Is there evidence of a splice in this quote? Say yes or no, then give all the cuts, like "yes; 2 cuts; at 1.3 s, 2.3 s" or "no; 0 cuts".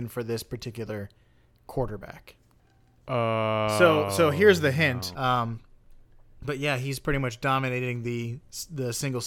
yes; 1 cut; at 5.1 s